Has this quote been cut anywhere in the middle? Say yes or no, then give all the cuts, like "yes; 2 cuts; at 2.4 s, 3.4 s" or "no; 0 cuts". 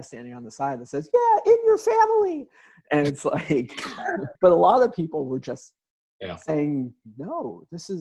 yes; 1 cut; at 4.4 s